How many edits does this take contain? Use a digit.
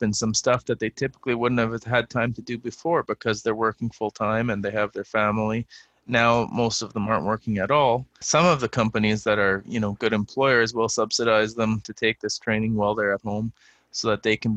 1